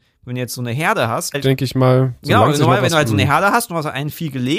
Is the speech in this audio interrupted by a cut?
yes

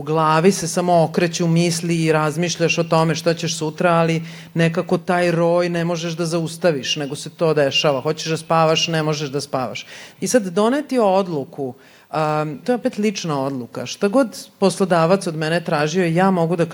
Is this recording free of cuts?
no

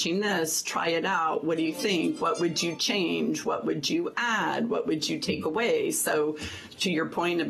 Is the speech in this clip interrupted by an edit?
no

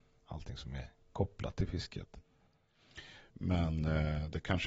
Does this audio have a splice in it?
yes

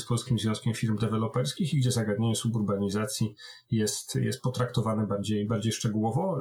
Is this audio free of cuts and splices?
yes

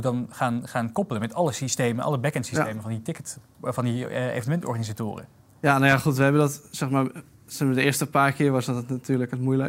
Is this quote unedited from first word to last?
yes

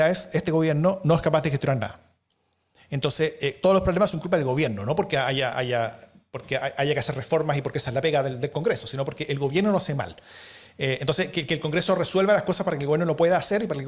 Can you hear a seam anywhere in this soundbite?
no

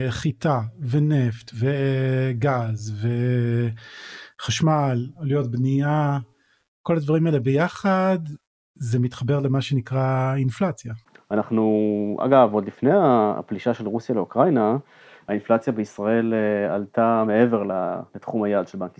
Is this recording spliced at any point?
yes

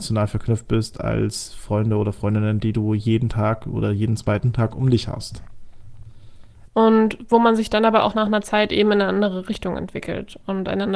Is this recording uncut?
no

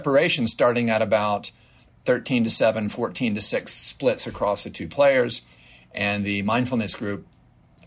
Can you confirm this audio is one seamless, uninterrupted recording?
yes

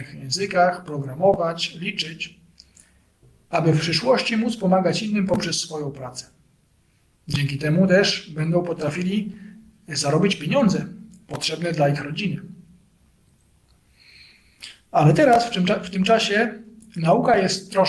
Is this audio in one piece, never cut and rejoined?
yes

